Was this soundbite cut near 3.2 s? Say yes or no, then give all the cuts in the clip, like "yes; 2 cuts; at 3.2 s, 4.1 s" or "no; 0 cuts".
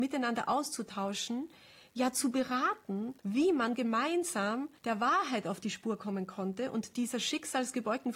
yes; 2 cuts; at 3.2 s, 4.8 s